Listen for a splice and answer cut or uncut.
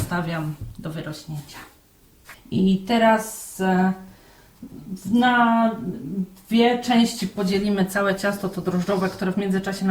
cut